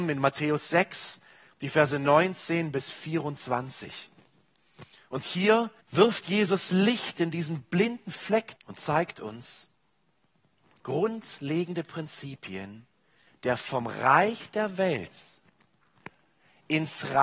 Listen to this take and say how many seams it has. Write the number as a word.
three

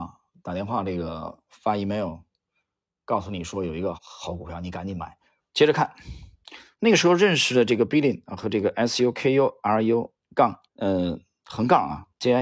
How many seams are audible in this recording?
three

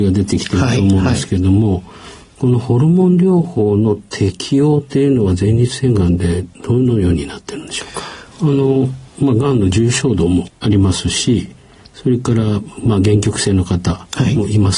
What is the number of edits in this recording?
one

